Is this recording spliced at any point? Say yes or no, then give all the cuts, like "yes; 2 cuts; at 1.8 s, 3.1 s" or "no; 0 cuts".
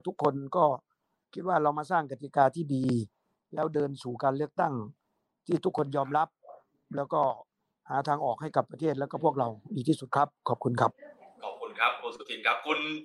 no; 0 cuts